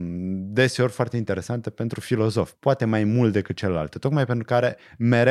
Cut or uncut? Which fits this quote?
cut